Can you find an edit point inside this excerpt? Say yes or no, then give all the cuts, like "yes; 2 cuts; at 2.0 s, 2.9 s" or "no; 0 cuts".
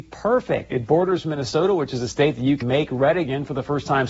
yes; 1 cut; at 2.6 s